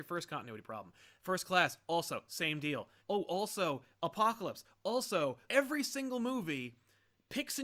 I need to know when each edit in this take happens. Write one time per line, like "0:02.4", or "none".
0:03.0
0:05.5